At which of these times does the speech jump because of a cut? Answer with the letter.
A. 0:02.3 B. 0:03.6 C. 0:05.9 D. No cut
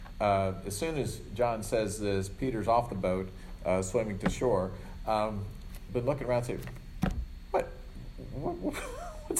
C